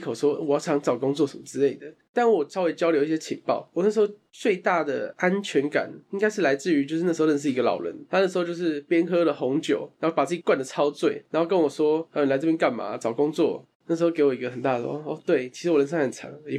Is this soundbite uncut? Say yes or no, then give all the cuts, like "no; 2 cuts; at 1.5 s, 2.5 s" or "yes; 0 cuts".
no; 1 cut; at 13.6 s